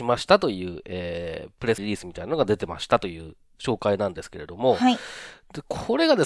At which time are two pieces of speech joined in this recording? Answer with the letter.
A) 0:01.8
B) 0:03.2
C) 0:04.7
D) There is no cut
A